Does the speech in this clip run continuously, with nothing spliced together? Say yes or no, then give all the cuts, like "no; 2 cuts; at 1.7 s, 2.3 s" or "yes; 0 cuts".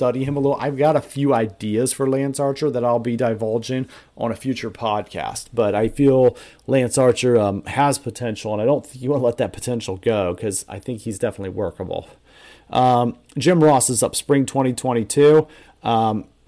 yes; 0 cuts